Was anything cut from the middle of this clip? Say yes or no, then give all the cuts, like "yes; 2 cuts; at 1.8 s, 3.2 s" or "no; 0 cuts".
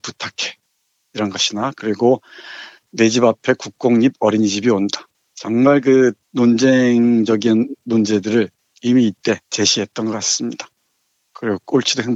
yes; 2 cuts; at 6.2 s, 9.4 s